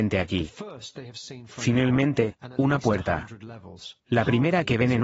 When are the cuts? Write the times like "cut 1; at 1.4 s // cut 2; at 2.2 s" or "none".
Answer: cut 1; at 4.0 s